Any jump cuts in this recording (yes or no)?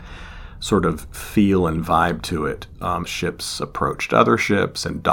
yes